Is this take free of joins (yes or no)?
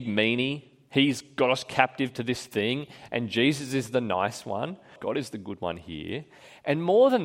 no